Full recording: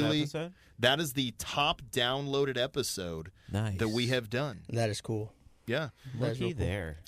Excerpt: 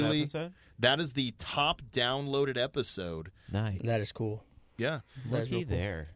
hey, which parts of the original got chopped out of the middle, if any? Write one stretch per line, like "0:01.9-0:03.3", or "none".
0:03.8-0:04.7